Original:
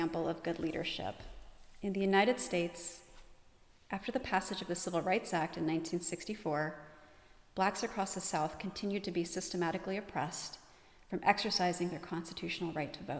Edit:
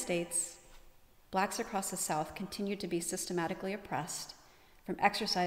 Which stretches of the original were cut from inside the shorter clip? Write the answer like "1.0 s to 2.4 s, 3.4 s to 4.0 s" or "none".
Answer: 3.6 s to 7.5 s